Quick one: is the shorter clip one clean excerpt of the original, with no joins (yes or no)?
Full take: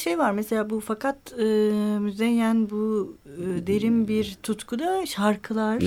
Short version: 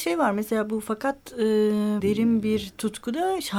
no